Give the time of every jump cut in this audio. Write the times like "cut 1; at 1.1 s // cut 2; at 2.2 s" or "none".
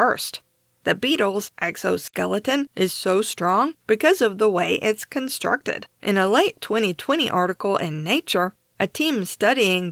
cut 1; at 5.9 s